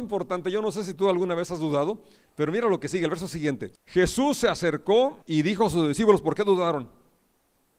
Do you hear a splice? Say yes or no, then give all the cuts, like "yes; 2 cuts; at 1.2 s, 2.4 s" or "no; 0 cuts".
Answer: yes; 2 cuts; at 3.8 s, 5.2 s